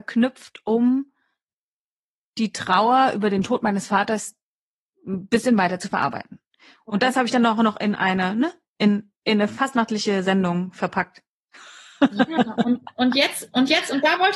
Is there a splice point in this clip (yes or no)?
no